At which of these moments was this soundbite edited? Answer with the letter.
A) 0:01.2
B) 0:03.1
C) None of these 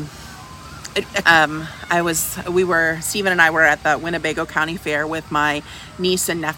A